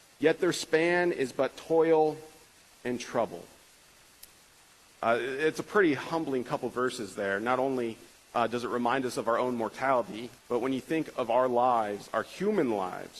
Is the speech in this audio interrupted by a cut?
yes; 1 cut; at 10.4 s

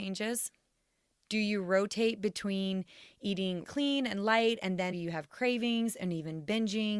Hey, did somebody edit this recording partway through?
yes; 2 cuts; at 3.6 s, 4.9 s

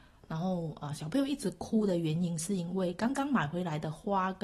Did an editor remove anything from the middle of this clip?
no; 0 cuts

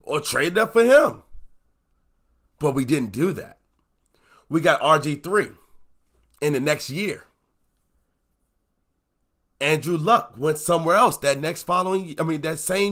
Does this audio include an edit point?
no; 0 cuts

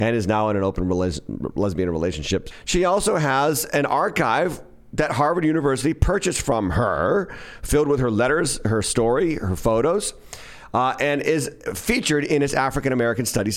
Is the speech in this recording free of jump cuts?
yes; 0 cuts

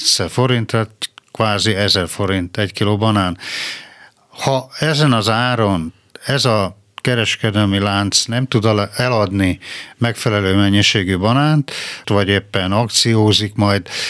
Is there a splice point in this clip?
yes; 1 cut; at 12.0 s

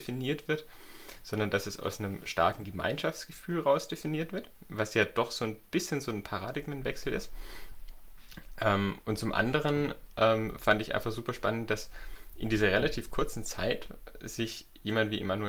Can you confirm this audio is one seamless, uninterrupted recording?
yes; 0 cuts

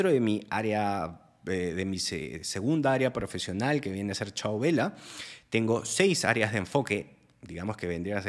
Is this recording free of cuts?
yes; 0 cuts

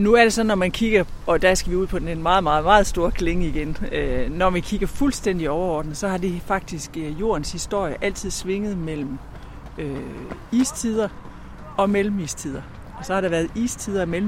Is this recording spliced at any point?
no; 0 cuts

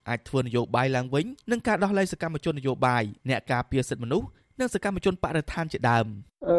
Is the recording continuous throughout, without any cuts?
no; 1 cut; at 1.4 s

